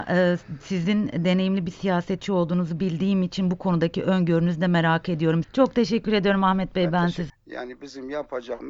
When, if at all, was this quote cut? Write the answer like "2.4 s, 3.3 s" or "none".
5.4 s, 7.3 s